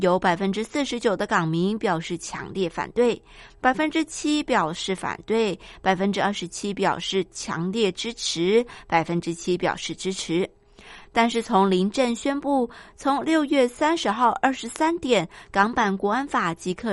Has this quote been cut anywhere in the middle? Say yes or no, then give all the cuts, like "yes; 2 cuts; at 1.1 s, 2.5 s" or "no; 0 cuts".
no; 0 cuts